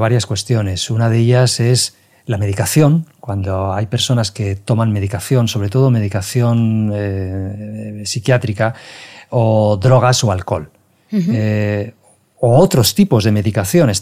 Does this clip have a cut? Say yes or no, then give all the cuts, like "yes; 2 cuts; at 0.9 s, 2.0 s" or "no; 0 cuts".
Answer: no; 0 cuts